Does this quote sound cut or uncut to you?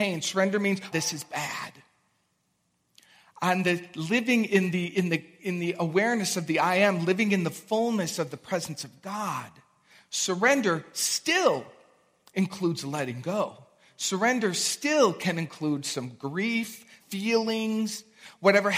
cut